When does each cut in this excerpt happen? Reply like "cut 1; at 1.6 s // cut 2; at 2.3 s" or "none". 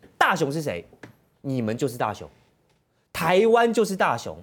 none